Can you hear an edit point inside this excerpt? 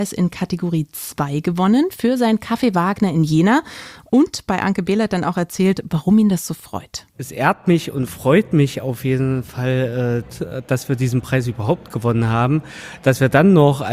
no; 0 cuts

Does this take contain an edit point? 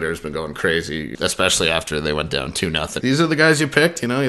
yes; 2 cuts; at 1.1 s, 3.0 s

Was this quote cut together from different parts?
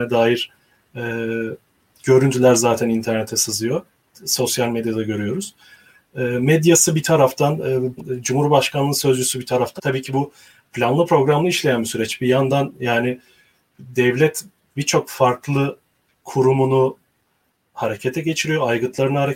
yes; 2 cuts; at 8.0 s, 9.8 s

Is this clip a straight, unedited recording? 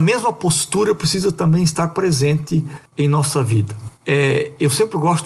yes; 0 cuts

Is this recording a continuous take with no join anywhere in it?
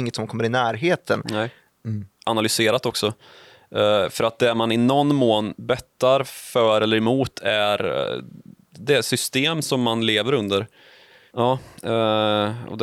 no; 2 cuts; at 1.7 s, 11.3 s

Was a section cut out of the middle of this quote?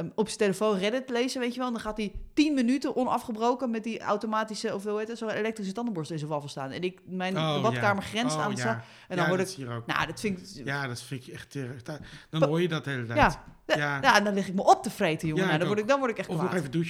no; 0 cuts

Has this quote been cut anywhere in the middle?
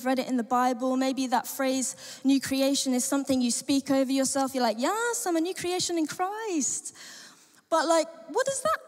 no; 0 cuts

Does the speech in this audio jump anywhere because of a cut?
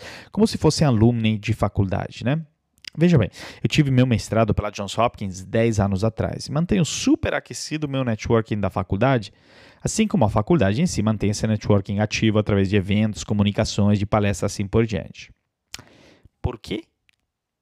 no; 0 cuts

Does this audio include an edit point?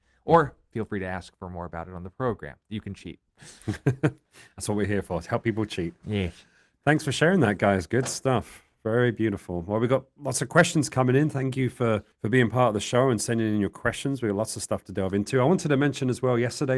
yes; 1 cut; at 12.1 s

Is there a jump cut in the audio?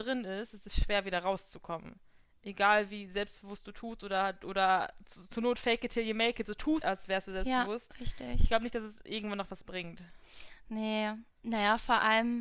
yes; 1 cut; at 6.8 s

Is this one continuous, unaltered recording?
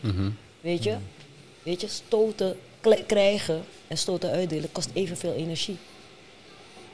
yes; 0 cuts

